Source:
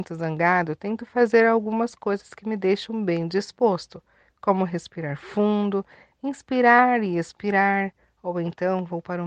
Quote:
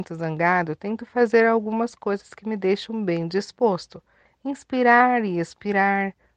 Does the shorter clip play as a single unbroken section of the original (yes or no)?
no